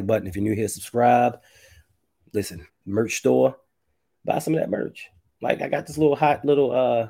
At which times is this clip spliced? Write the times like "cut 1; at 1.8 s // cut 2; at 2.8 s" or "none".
cut 1; at 2.7 s